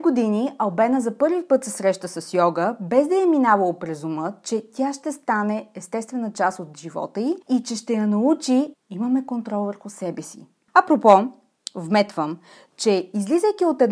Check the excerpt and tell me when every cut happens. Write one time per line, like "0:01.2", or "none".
0:07.4
0:08.7
0:10.7